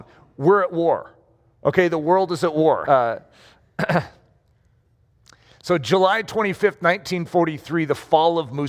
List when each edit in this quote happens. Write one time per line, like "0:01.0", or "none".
0:02.9